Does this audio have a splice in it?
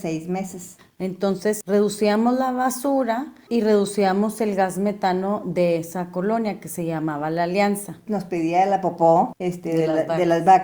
yes; 1 cut; at 8.1 s

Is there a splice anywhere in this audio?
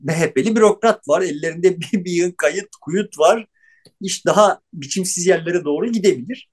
no; 0 cuts

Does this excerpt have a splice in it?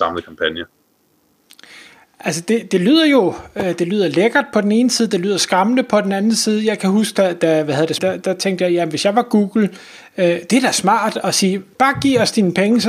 yes; 1 cut; at 8.0 s

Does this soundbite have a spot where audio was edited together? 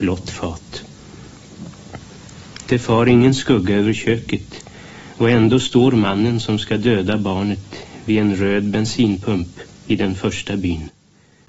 no; 0 cuts

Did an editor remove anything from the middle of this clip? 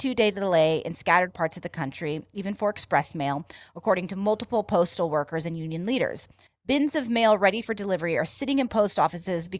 yes; 1 cut; at 6.5 s

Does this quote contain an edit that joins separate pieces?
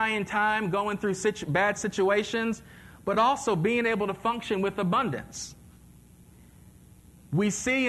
no; 0 cuts

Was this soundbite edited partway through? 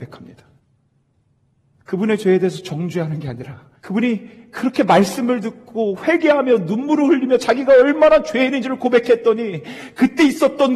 yes; 2 cuts; at 1.7 s, 3.8 s

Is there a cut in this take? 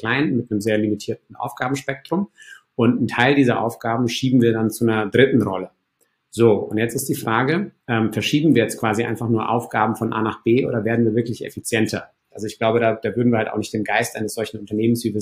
yes; 2 cuts; at 7.8 s, 12.3 s

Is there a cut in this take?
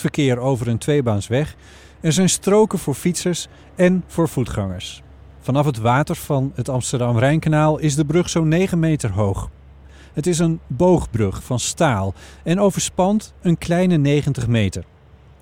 no; 0 cuts

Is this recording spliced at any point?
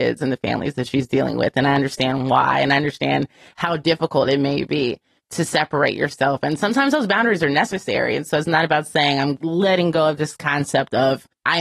no; 0 cuts

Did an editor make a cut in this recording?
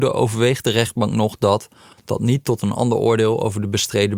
yes; 1 cut; at 1.9 s

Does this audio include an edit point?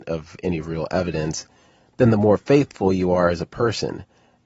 no; 0 cuts

